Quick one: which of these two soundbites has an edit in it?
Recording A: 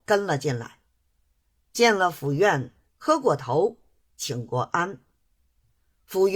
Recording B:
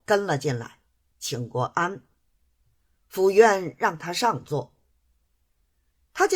B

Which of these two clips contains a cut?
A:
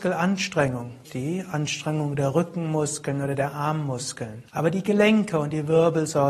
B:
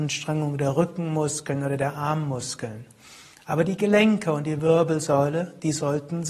A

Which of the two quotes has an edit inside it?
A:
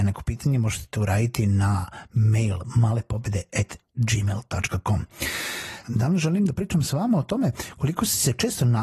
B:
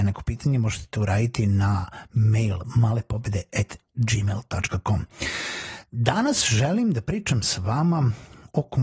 A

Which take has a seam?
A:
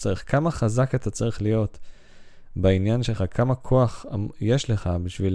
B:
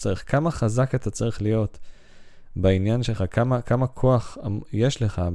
A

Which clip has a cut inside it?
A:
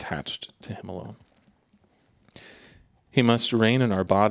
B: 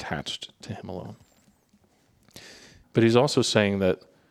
B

